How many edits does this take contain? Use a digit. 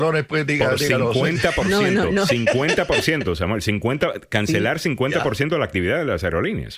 0